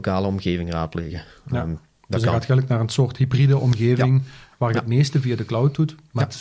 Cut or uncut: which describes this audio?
uncut